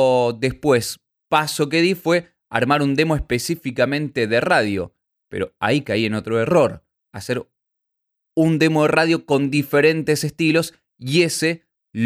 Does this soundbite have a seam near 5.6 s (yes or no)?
no